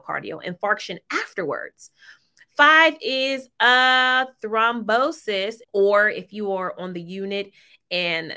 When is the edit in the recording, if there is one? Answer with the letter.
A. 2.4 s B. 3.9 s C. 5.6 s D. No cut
C